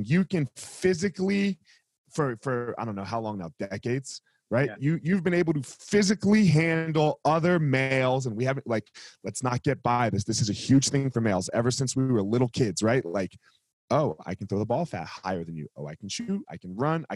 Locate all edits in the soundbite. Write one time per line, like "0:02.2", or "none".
none